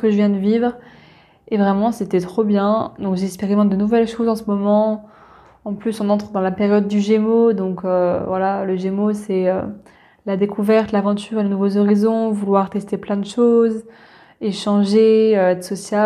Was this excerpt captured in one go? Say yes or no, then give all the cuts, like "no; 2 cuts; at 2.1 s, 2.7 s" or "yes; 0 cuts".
yes; 0 cuts